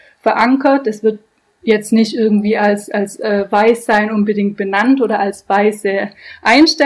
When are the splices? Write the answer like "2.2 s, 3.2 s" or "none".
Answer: none